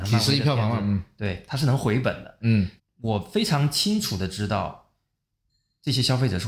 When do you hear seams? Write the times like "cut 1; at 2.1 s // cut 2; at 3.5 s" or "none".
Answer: cut 1; at 2.8 s